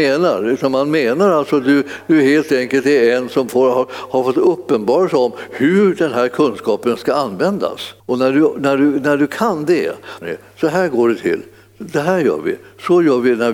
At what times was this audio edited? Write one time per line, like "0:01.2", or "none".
0:08.0
0:10.2